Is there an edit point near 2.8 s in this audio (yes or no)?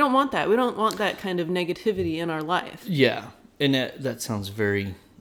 no